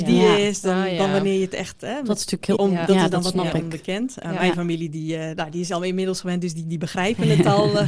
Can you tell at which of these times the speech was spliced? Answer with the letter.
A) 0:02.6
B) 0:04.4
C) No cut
A